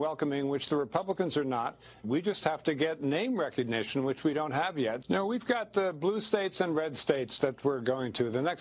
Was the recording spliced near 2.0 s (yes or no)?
yes